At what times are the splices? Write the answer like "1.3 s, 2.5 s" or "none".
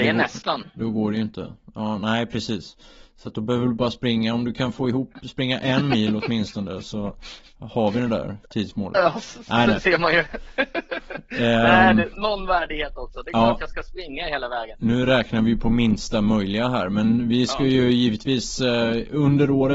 12.1 s